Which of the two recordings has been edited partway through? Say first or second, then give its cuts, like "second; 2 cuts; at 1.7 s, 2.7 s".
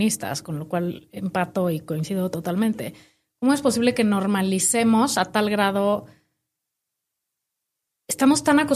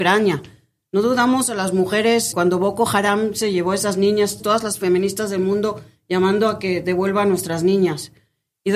second; 2 cuts; at 2.3 s, 4.4 s